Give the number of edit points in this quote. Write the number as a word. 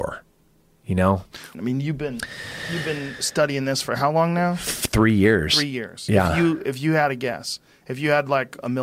one